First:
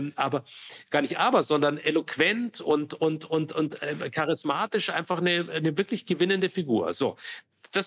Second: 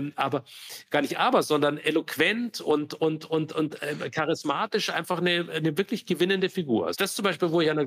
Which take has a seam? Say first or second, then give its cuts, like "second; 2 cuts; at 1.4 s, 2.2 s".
second; 1 cut; at 6.9 s